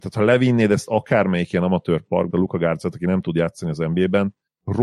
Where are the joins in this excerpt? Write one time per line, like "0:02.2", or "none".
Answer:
0:02.3